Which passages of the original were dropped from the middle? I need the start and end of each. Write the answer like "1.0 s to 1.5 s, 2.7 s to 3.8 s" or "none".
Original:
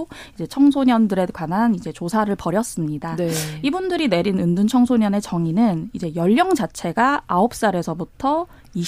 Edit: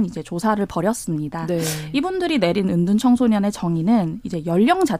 none